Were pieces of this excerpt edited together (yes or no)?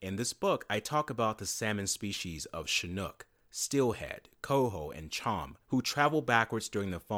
yes